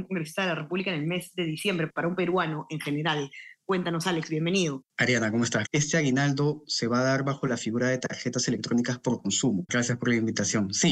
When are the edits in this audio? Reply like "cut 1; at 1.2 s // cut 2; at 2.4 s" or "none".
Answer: cut 1; at 5.6 s // cut 2; at 9.7 s